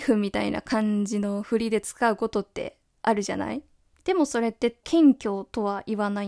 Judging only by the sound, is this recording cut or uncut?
cut